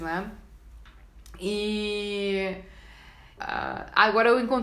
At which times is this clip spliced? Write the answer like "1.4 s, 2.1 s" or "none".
3.4 s